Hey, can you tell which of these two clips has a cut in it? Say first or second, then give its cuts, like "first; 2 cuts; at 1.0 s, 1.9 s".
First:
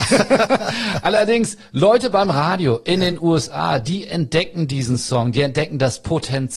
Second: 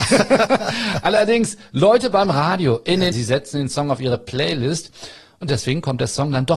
second; 1 cut; at 3.1 s